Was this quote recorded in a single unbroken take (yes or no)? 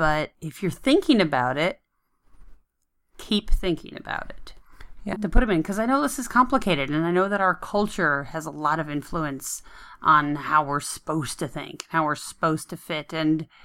no